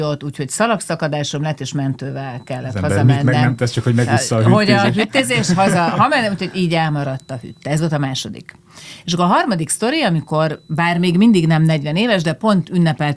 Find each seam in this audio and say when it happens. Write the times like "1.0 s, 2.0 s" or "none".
none